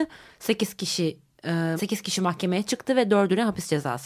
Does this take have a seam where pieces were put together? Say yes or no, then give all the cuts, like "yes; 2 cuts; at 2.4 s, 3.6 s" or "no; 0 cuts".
yes; 1 cut; at 1.8 s